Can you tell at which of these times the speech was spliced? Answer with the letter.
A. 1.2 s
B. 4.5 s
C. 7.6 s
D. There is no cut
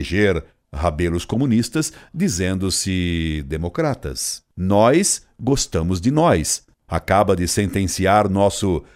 B